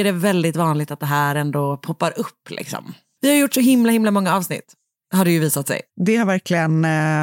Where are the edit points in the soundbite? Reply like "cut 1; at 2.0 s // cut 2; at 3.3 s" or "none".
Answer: cut 1; at 3.2 s // cut 2; at 5.9 s